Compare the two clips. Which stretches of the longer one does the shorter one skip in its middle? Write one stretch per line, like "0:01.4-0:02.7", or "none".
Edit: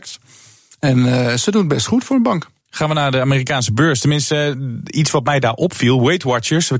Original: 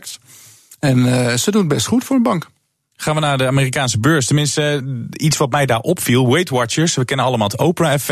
0:02.6-0:02.9